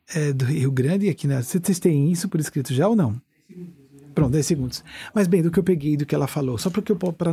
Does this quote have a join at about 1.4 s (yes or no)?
no